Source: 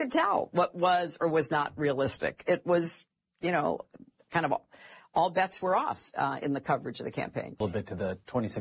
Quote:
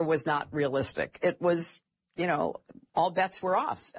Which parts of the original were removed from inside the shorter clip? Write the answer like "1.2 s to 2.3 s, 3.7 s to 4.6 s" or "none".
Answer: 4.1 s to 5.1 s